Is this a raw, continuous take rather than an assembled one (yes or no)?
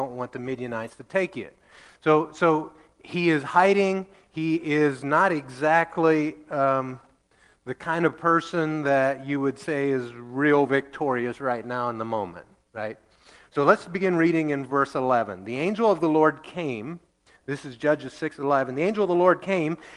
yes